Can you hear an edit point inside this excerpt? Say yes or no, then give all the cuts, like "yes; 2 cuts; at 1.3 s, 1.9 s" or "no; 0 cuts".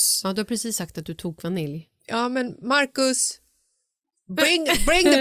no; 0 cuts